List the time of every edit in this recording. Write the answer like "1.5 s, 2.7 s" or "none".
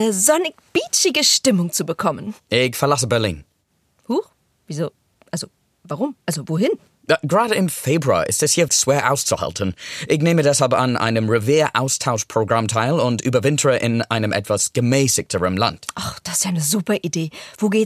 8.7 s